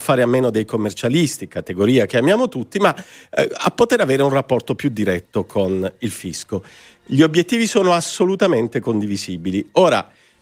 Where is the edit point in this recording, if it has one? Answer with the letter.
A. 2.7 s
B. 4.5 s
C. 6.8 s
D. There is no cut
D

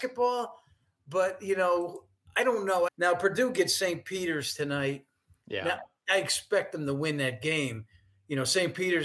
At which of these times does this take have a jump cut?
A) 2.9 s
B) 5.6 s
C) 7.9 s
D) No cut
A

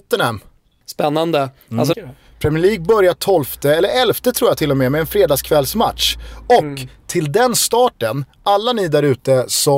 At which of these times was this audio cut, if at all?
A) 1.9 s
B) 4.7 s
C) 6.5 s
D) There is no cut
A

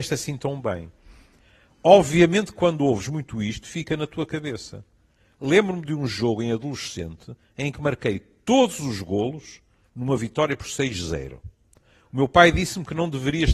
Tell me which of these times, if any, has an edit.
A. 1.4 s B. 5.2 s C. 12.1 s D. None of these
D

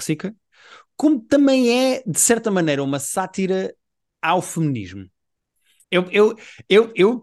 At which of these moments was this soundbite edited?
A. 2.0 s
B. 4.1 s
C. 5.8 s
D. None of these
C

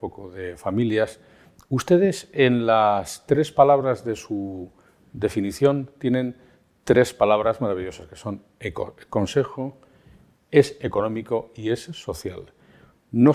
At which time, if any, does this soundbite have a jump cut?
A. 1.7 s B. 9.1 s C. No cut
C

